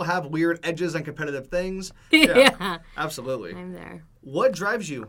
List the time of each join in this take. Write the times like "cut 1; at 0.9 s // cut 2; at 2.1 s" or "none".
cut 1; at 2.1 s